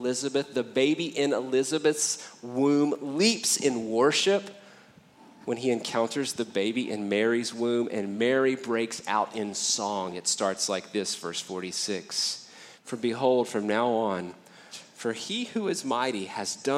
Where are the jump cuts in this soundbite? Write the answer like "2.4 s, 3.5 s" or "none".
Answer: 12.7 s, 14.7 s

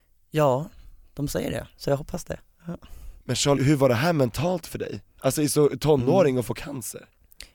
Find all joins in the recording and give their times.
3.6 s

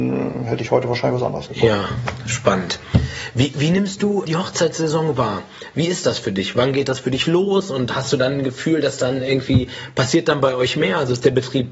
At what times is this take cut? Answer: 4.2 s

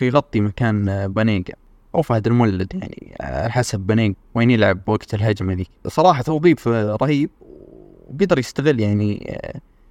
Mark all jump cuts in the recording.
4.1 s

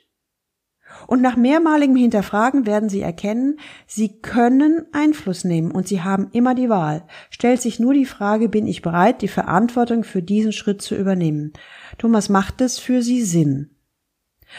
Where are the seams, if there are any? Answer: none

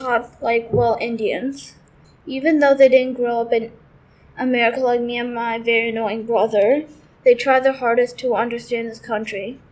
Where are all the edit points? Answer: 2.0 s

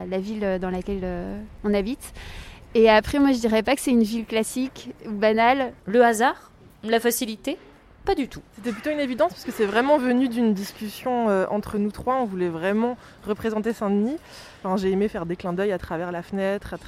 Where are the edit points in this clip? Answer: 5.8 s

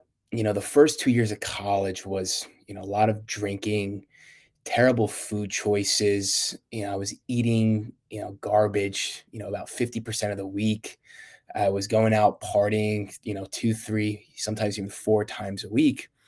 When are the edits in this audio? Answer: none

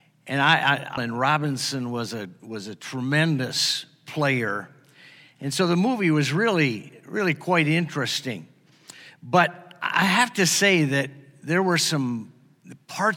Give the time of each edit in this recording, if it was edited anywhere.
1.0 s

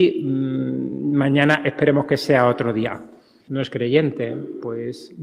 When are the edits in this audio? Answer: 3.5 s

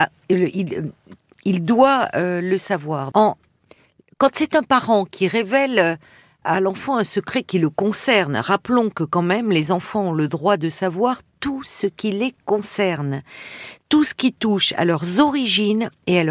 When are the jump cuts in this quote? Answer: 3.1 s, 6.4 s

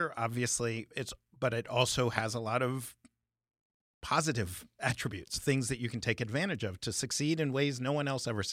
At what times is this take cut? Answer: 4.8 s

